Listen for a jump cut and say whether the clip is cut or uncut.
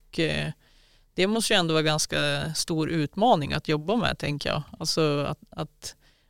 uncut